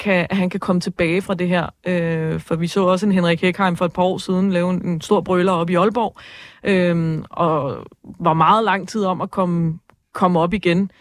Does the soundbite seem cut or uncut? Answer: uncut